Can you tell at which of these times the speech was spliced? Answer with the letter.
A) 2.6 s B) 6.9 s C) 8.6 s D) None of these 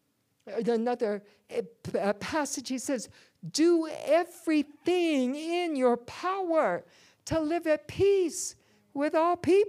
D